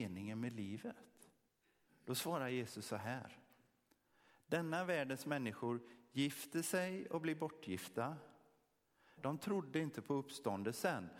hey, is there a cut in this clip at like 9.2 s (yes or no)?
yes